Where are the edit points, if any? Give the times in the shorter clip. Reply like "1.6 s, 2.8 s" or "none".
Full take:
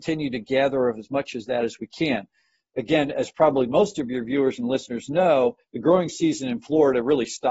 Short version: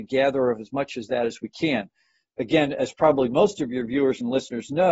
none